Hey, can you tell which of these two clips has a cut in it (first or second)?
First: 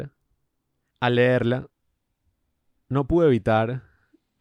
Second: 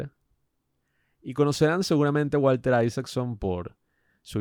first